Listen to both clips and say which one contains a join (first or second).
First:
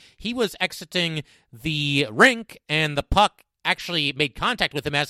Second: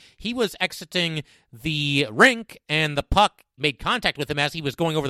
second